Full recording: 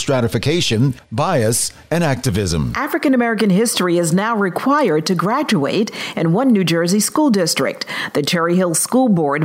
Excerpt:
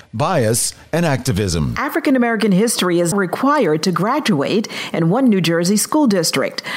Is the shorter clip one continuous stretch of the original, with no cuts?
no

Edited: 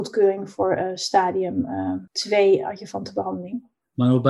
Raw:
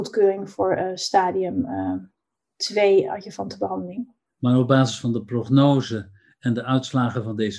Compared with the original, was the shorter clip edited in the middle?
yes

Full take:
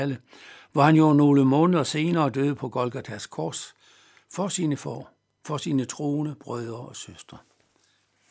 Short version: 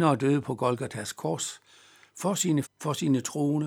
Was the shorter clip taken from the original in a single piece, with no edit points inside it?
no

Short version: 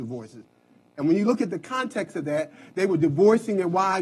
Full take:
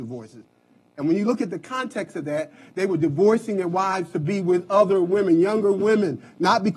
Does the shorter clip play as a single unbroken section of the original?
yes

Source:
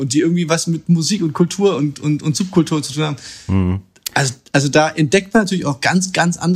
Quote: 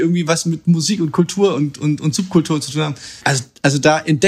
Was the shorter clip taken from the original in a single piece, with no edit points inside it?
no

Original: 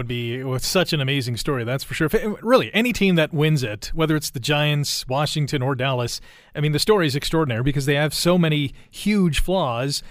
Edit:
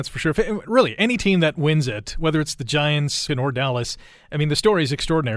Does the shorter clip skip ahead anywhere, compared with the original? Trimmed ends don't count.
yes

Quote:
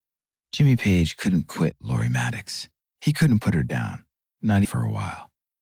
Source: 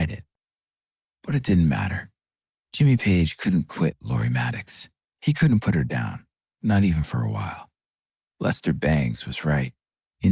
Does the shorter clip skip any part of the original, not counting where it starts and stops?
yes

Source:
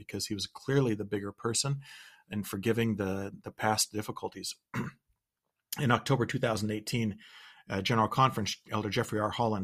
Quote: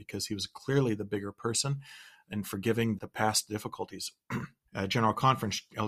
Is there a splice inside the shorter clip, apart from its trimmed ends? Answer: yes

